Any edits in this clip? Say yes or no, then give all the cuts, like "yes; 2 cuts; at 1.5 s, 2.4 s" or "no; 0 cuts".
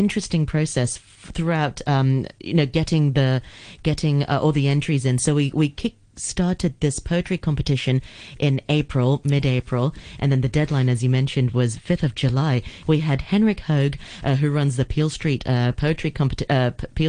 yes; 1 cut; at 12.8 s